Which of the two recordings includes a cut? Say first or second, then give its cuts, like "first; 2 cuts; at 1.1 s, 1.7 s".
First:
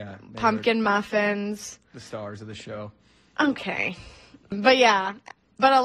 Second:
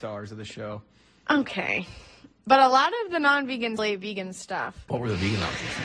second; 3 cuts; at 2.3 s, 3.8 s, 4.9 s